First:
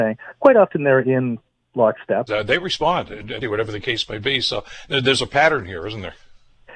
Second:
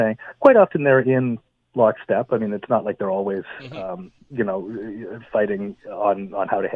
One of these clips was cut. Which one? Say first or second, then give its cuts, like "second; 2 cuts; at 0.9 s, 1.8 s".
first; 2 cuts; at 2.3 s, 3.4 s